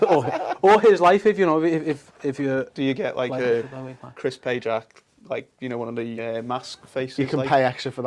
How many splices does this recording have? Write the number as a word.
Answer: zero